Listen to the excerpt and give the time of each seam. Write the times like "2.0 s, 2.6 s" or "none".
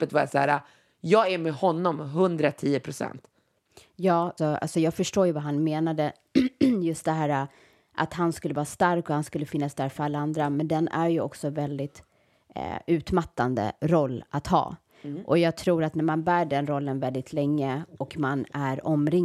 4.4 s

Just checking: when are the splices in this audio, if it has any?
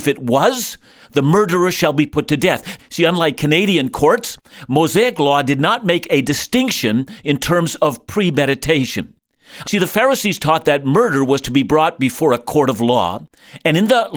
2.8 s, 9.6 s

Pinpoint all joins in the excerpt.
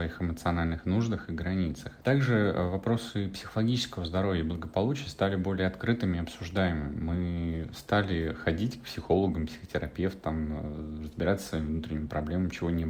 2.0 s

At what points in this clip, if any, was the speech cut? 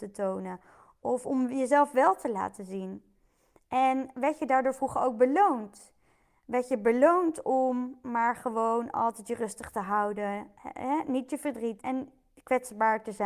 11.8 s

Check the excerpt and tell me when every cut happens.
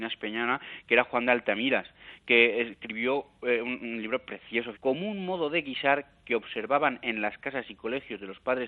4.7 s

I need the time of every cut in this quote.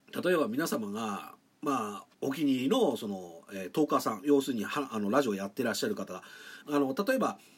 2.1 s, 6.6 s

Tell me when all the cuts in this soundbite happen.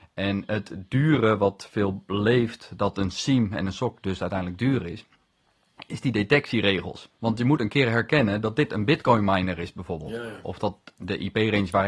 7.2 s

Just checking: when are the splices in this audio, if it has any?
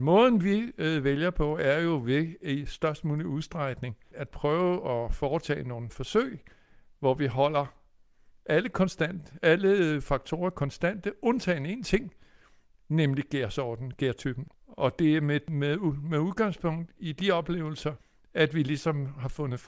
4.1 s, 14.5 s

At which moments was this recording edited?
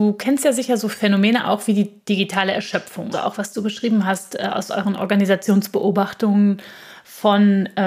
3.1 s

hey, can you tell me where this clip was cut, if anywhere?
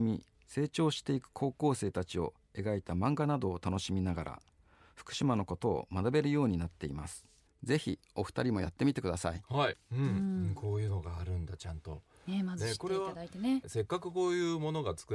7.5 s, 9.7 s, 13.6 s

